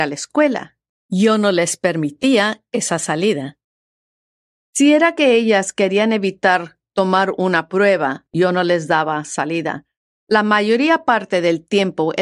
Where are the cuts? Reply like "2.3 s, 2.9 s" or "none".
8.3 s